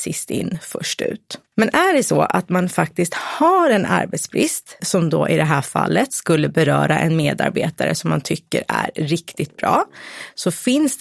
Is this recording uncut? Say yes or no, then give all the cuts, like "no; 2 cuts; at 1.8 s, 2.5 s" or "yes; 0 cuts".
no; 2 cuts; at 1.5 s, 4.8 s